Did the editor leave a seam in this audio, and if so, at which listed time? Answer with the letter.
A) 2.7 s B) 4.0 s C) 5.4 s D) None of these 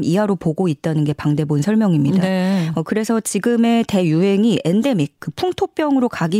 D